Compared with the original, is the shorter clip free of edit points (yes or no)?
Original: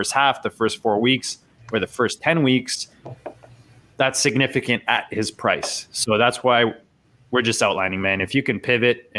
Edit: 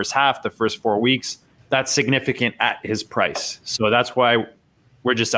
no